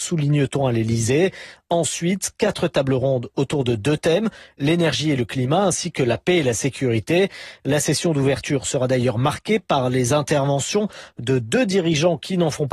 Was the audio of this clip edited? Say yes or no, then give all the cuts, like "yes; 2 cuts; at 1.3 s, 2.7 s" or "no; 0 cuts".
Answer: yes; 1 cut; at 7.6 s